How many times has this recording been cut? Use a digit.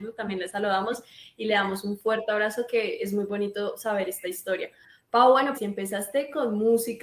1